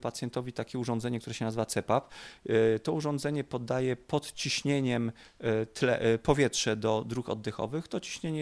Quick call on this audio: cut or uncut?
uncut